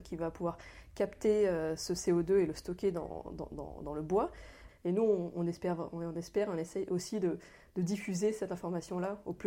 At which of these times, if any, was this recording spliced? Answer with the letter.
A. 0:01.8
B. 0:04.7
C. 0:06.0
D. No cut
B